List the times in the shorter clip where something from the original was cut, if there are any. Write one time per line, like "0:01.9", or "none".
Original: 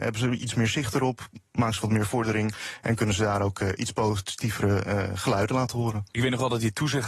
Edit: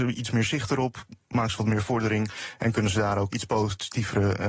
0:03.3